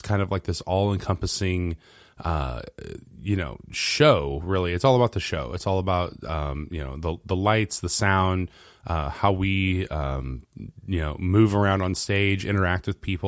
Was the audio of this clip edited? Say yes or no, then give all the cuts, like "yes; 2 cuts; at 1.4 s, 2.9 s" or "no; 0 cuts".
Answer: yes; 1 cut; at 12.4 s